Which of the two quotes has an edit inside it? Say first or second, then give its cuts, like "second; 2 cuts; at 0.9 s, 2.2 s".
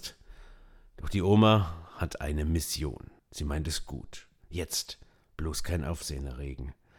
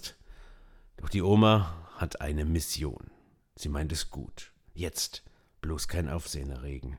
first; 1 cut; at 3.2 s